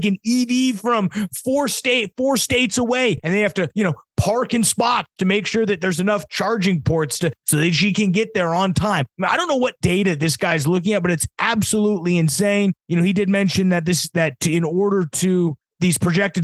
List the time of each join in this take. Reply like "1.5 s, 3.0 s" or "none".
none